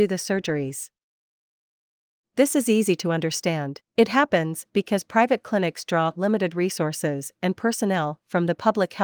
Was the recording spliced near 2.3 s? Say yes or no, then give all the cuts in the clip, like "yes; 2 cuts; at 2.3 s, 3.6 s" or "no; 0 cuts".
no; 1 cut; at 3.9 s